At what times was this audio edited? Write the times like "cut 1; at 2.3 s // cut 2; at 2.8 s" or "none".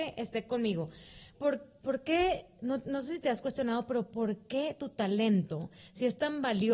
cut 1; at 1.3 s